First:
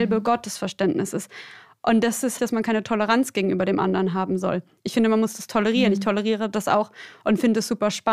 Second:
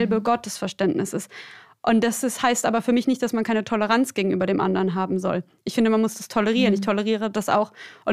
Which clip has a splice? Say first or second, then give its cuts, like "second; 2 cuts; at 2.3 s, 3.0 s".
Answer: first; 1 cut; at 2.4 s